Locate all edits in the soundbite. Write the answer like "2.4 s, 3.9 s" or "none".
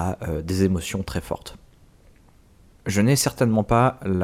none